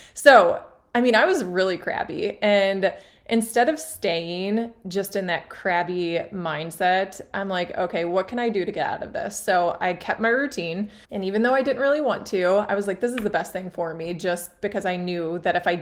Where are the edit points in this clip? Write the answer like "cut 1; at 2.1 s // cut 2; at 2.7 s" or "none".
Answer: cut 1; at 11.0 s